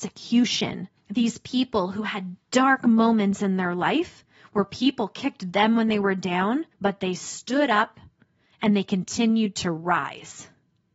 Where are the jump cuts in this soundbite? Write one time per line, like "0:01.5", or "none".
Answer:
0:01.0
0:06.7